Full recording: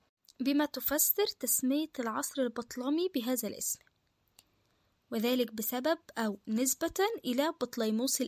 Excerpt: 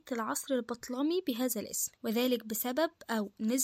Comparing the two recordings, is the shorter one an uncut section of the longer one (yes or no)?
no